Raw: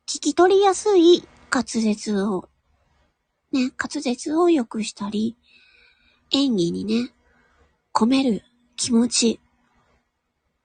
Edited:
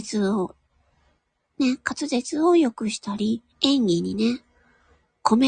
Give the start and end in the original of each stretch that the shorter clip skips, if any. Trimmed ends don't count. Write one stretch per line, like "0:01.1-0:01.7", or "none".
0:05.4-0:06.2